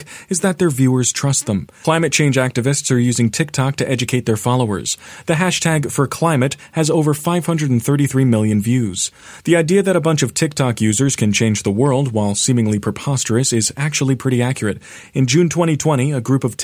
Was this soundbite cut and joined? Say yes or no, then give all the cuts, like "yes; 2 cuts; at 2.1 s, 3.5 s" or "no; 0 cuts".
yes; 1 cut; at 1.8 s